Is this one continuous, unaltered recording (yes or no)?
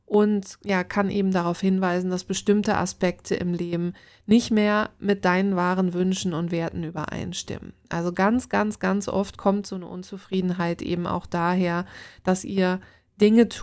yes